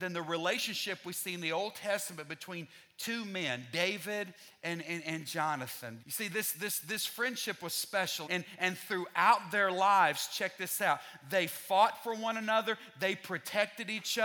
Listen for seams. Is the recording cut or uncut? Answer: cut